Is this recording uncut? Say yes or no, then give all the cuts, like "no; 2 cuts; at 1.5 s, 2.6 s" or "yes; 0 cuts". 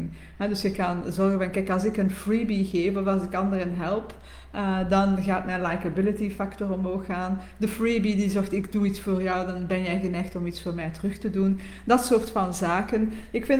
yes; 0 cuts